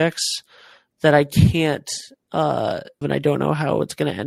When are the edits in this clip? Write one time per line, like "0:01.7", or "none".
0:03.0

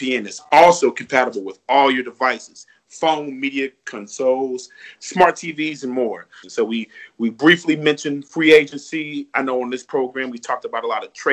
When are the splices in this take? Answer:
0:06.4

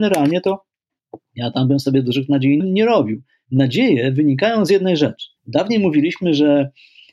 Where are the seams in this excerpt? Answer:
0:02.6
0:05.4

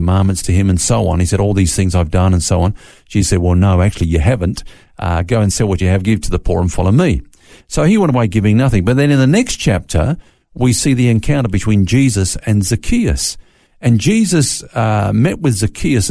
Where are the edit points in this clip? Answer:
none

